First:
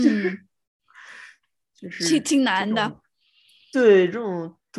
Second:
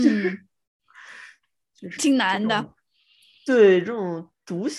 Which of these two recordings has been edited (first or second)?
second